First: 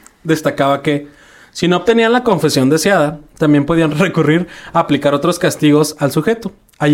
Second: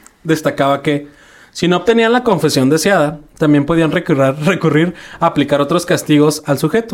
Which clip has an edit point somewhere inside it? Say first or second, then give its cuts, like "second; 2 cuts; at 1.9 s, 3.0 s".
first; 1 cut; at 3.9 s